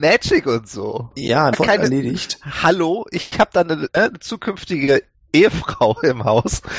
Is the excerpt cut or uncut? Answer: cut